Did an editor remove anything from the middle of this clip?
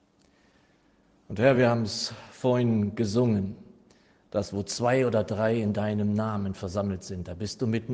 no; 0 cuts

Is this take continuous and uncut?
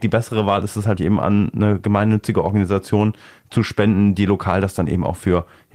no; 1 cut; at 1.0 s

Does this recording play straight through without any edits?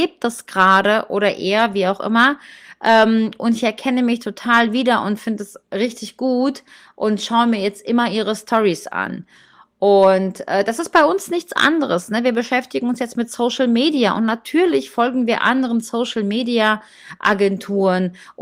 yes; 0 cuts

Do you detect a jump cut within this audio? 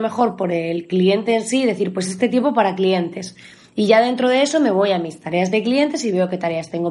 no; 0 cuts

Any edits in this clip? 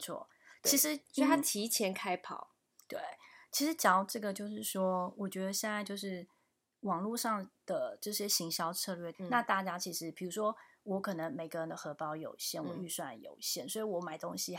yes; 1 cut; at 9.1 s

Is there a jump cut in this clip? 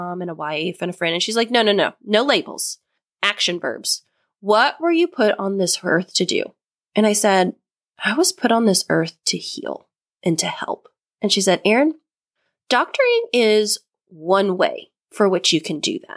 no; 0 cuts

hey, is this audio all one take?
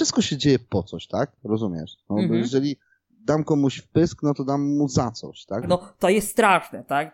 no; 2 cuts; at 1.4 s, 5.6 s

